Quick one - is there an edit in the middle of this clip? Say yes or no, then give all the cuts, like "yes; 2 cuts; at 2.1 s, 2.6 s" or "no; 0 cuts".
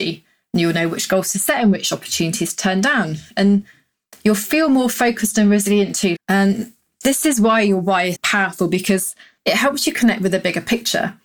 yes; 2 cuts; at 6.2 s, 8.2 s